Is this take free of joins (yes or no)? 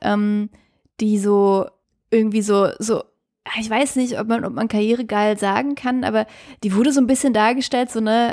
yes